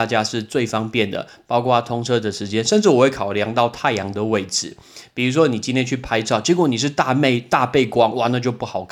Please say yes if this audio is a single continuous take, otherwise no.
yes